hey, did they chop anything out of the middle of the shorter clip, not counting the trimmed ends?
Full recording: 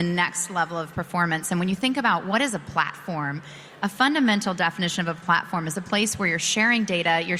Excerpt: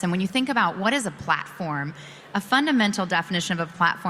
no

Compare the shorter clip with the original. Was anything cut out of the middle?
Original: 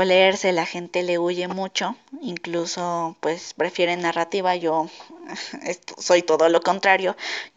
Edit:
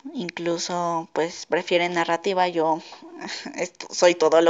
no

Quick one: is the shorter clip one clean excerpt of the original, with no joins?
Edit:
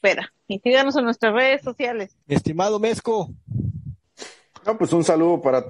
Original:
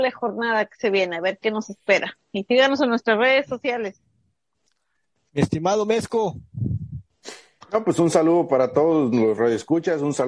no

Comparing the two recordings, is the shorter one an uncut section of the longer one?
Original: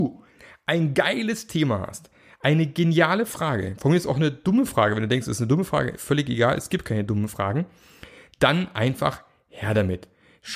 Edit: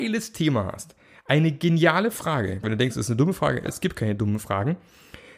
no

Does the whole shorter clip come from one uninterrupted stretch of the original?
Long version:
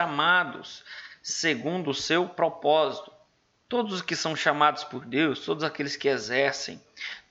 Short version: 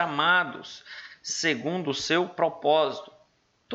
yes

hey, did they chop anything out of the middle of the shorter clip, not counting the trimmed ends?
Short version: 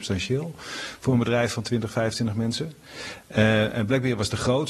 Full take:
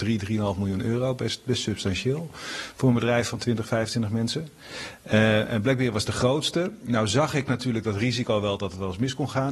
no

